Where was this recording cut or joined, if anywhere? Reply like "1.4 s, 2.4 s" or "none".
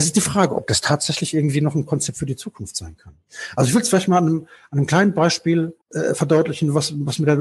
5.8 s